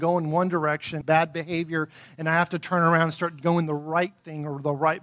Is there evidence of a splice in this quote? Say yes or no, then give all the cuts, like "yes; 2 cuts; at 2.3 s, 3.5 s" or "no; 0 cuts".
yes; 1 cut; at 1.0 s